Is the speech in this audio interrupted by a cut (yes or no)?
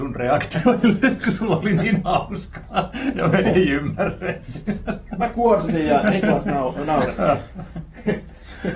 no